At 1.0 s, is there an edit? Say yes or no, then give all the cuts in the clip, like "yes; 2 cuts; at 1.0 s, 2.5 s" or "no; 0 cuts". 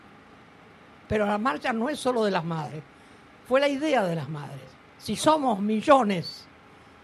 no; 1 cut; at 4.8 s